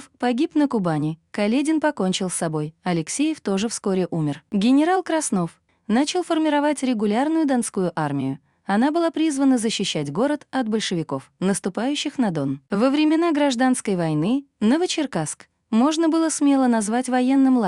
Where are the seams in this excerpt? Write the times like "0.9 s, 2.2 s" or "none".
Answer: 5.7 s